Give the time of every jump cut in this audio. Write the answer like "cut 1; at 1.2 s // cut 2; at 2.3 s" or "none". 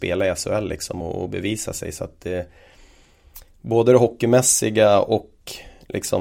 none